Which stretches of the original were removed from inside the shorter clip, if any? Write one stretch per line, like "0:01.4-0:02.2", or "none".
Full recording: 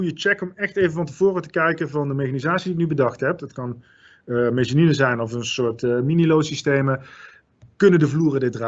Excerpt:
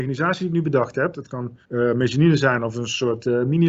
0:03.9-0:04.2